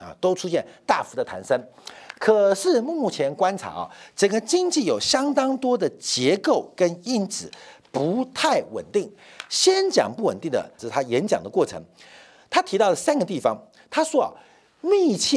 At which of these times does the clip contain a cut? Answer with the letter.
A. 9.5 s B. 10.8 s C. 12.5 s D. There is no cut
B